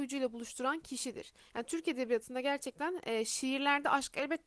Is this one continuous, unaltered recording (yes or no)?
yes